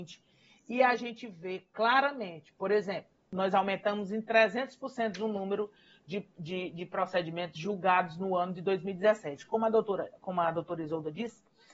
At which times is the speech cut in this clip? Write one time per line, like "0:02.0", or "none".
none